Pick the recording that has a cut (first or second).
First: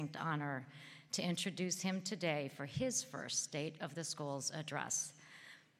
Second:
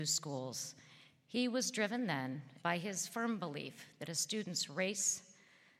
second